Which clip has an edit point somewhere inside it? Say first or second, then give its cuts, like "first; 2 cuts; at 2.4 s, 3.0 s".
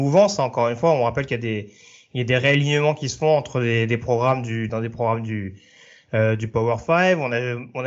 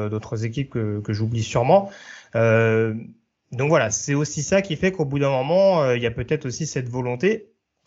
first; 1 cut; at 4.7 s